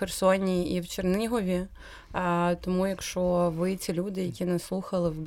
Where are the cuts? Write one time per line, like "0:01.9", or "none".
none

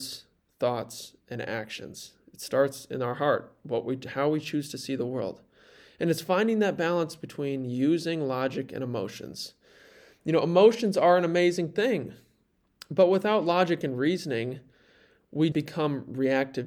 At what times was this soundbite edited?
0:15.5

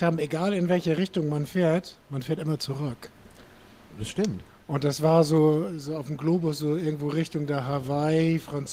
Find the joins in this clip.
none

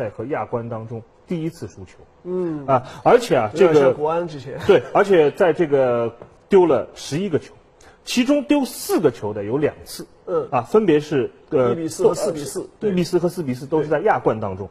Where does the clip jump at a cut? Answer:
0:06.4

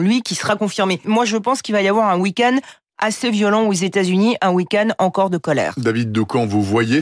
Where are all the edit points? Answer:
0:01.0

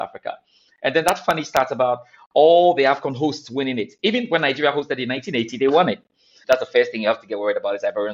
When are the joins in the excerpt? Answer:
0:06.4

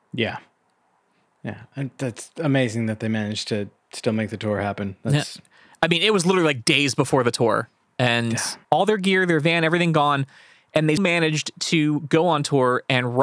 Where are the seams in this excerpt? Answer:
0:08.6
0:11.0

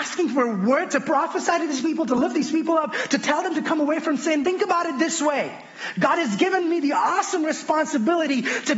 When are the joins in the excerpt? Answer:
0:04.4

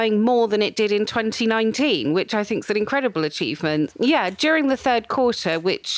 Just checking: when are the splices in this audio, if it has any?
0:03.9

